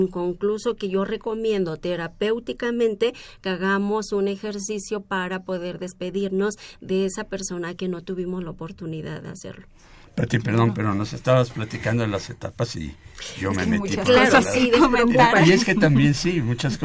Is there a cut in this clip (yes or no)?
no